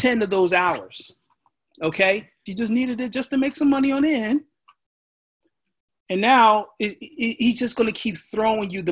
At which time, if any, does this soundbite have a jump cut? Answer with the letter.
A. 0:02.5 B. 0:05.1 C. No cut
A